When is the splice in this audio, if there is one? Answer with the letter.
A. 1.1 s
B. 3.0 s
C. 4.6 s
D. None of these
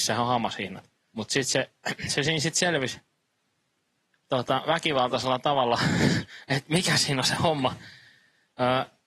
A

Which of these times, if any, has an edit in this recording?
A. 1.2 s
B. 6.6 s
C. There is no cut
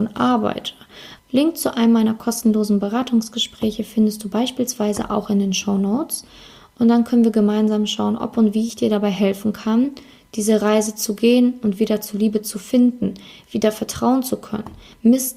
A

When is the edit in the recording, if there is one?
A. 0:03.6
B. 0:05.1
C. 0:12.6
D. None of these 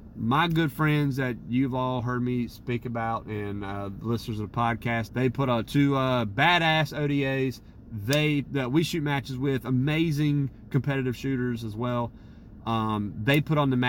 B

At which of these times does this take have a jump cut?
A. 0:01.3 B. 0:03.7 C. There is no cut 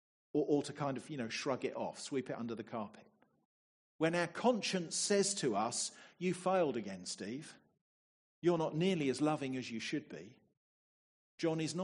C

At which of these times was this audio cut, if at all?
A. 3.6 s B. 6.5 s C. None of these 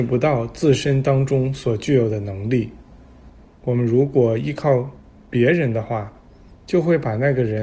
A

